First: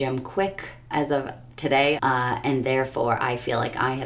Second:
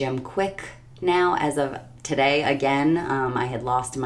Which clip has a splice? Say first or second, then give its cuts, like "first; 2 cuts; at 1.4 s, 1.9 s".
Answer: first; 2 cuts; at 0.9 s, 2.0 s